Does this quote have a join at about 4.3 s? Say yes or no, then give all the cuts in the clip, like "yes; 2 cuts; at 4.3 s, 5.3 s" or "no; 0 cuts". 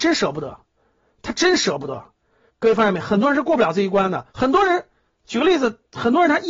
yes; 2 cuts; at 2.5 s, 4.3 s